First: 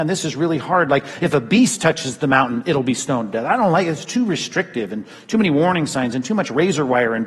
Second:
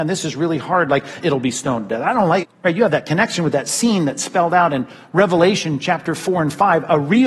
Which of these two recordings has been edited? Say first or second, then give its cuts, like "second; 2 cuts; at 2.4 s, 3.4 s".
second; 2 cuts; at 1.2 s, 2.4 s